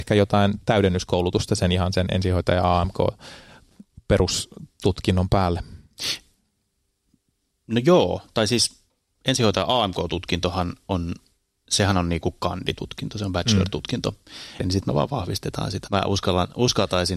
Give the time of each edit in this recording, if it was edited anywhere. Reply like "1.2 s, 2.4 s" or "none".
14.6 s, 15.9 s